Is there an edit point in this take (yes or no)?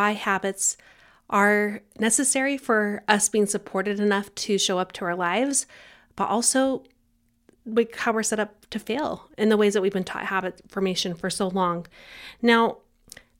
no